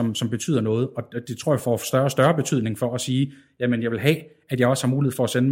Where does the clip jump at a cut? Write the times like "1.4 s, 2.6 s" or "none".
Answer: none

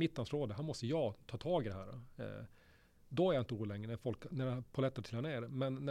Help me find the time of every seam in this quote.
none

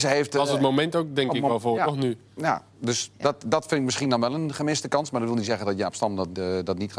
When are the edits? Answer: none

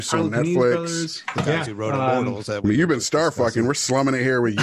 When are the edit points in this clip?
none

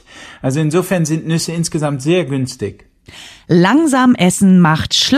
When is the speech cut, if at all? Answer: none

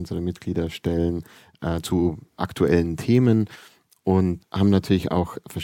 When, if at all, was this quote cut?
none

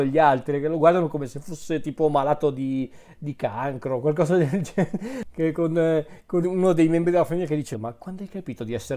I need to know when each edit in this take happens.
6.4 s, 7.7 s

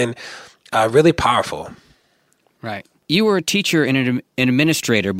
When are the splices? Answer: 3.0 s

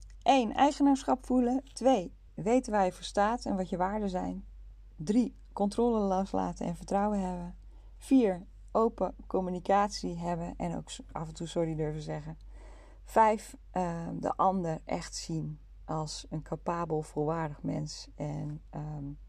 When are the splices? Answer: none

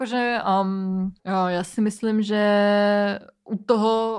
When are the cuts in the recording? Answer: 1.2 s

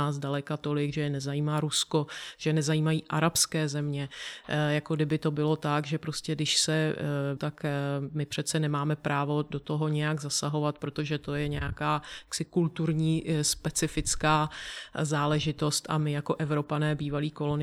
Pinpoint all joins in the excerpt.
7.4 s

